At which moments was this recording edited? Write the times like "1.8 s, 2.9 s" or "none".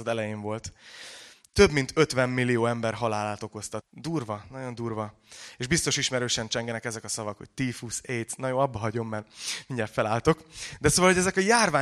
3.8 s